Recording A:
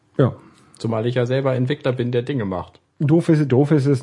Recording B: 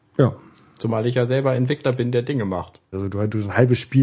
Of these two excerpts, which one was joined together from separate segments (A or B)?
B